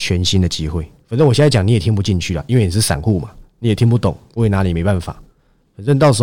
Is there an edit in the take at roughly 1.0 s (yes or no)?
no